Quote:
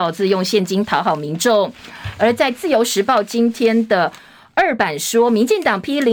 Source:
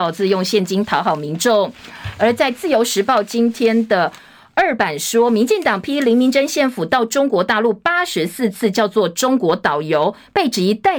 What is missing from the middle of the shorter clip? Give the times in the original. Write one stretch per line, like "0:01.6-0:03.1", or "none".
none